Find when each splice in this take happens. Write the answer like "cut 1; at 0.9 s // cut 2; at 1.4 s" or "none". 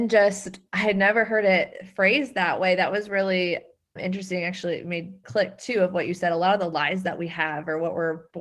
cut 1; at 4.0 s // cut 2; at 5.2 s